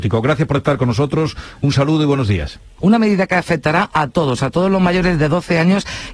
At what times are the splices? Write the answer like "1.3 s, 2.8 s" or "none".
2.8 s